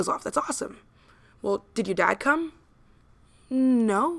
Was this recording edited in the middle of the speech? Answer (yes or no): no